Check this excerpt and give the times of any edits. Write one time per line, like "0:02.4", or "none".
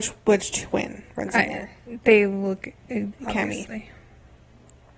0:03.1